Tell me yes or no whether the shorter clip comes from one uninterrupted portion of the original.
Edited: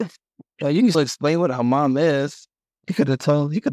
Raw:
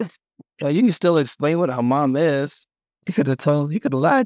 no